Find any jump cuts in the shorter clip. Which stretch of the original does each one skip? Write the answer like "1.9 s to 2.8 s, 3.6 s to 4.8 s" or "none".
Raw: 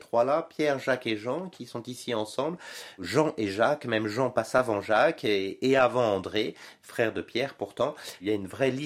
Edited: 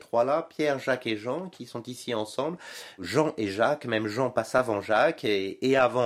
none